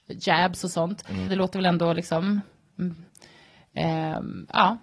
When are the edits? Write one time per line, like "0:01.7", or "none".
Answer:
0:01.3